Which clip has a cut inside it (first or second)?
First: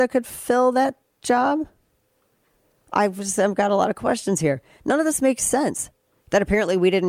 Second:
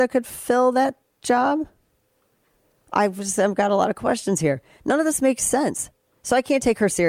first